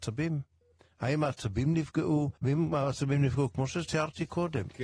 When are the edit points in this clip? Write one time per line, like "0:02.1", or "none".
0:02.4